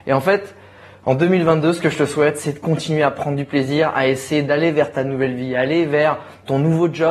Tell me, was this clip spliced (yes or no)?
no